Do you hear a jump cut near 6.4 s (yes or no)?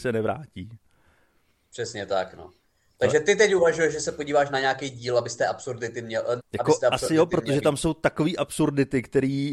yes